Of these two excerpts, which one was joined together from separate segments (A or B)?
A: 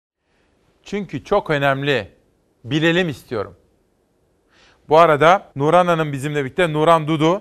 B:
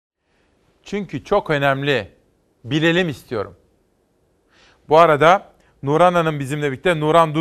A